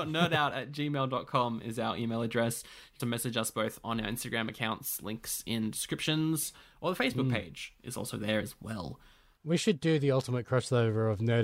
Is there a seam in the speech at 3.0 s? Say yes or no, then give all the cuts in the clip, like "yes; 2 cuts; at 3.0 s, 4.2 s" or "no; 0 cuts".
yes; 1 cut; at 3.0 s